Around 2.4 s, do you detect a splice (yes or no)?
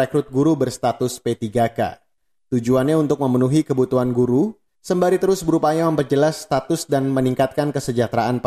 no